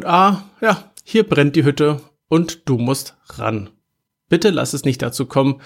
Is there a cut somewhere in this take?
no; 0 cuts

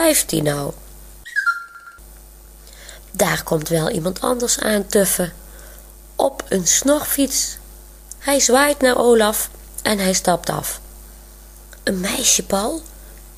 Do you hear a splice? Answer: yes; 2 cuts; at 8.2 s, 11.8 s

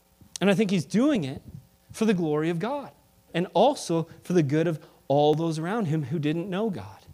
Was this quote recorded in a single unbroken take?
no; 1 cut; at 3.3 s

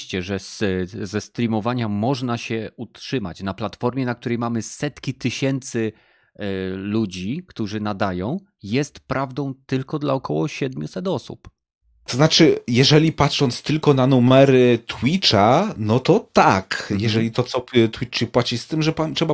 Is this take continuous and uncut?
yes; 0 cuts

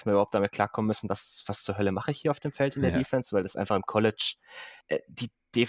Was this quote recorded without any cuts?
yes; 0 cuts

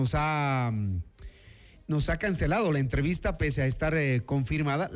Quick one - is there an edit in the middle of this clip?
no; 0 cuts

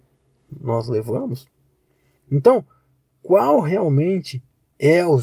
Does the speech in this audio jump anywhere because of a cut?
no; 0 cuts

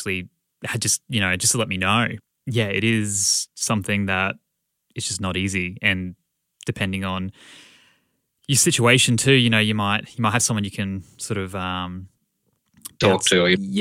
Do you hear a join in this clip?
no; 0 cuts

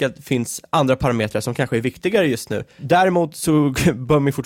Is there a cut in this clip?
no; 0 cuts

